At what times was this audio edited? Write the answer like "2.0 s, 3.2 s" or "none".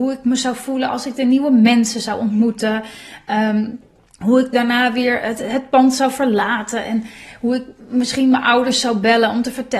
none